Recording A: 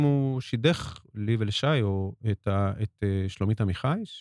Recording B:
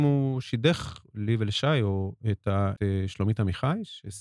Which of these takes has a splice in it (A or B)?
B